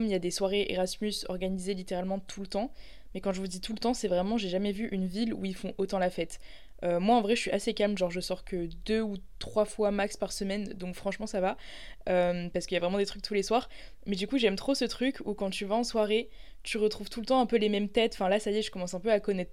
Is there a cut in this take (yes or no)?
no